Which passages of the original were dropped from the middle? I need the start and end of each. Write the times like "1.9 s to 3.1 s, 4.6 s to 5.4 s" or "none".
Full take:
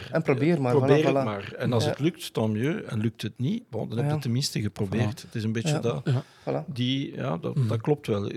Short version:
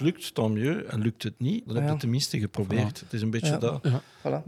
3.7 s to 3.9 s